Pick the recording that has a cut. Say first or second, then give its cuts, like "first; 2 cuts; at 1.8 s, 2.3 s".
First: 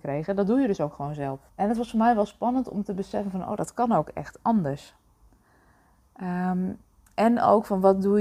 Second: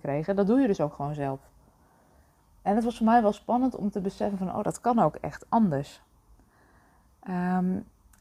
first; 1 cut; at 1.5 s